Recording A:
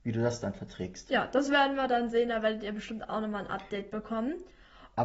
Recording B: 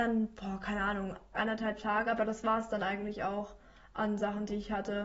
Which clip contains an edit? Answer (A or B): B